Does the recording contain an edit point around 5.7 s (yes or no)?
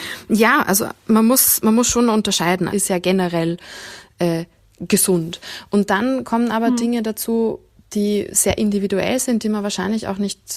no